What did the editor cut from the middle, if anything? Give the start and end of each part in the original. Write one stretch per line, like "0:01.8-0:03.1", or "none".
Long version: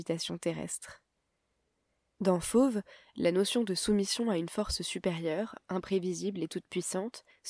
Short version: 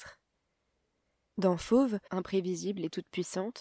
0:02.9-0:05.6